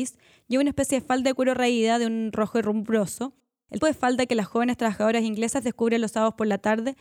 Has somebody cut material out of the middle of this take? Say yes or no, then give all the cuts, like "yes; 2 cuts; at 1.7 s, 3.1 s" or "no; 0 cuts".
yes; 1 cut; at 3.8 s